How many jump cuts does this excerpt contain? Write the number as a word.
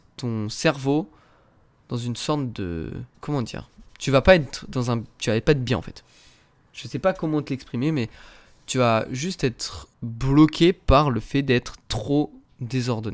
two